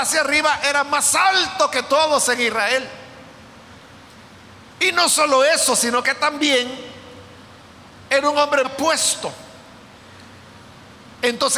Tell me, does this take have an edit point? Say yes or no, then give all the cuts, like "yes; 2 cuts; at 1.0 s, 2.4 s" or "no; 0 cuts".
yes; 1 cut; at 8.6 s